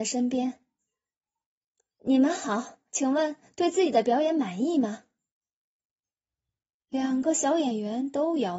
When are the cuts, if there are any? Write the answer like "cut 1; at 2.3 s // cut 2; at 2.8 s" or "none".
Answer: cut 1; at 2.9 s